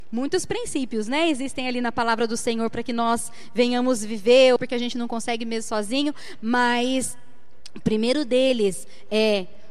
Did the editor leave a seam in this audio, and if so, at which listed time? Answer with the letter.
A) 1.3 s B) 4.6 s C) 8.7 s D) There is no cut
B